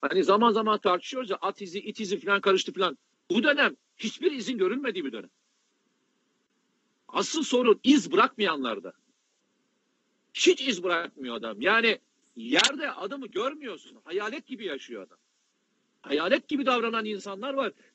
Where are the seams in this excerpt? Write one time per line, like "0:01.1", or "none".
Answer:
0:03.1